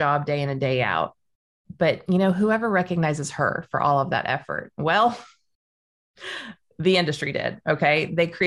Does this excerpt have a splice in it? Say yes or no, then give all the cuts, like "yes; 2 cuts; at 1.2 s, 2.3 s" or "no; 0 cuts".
no; 0 cuts